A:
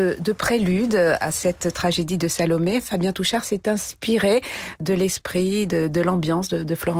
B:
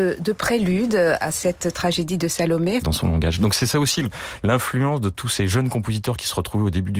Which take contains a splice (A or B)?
B